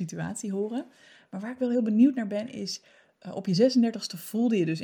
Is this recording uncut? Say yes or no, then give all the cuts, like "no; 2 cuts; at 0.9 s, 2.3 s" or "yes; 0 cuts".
yes; 0 cuts